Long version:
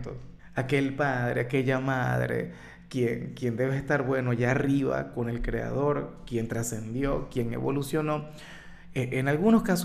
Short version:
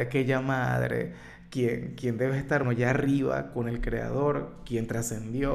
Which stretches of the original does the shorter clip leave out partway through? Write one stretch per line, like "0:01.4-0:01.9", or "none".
0:04.0-0:04.2